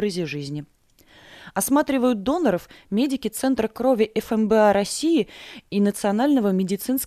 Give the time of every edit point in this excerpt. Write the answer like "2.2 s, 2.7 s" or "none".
none